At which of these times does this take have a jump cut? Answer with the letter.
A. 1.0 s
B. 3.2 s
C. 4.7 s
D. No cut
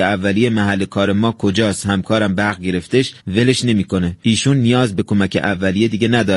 B